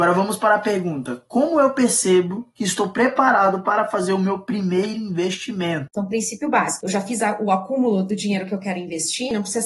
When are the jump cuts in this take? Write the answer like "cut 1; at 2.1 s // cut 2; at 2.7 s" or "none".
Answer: none